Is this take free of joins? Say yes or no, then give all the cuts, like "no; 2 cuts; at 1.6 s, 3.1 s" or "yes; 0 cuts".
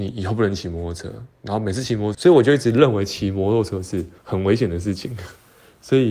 no; 2 cuts; at 2.1 s, 4.2 s